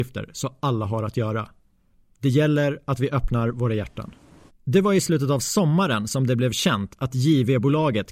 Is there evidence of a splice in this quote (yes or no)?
yes